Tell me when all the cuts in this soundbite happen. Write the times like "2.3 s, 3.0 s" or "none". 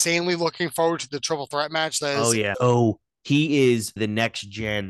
2.5 s, 4.0 s